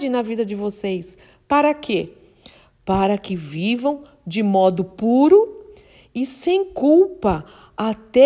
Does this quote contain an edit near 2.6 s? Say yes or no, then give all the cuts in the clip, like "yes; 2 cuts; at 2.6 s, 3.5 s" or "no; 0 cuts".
no; 0 cuts